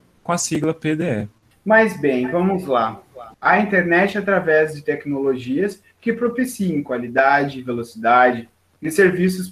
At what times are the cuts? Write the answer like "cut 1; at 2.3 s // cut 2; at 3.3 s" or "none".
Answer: cut 1; at 3.3 s